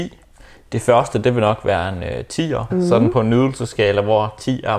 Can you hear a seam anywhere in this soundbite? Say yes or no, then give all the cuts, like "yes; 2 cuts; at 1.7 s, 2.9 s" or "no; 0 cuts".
yes; 1 cut; at 2.7 s